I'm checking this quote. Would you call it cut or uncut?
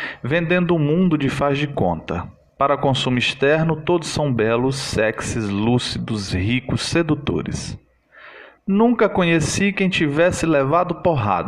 cut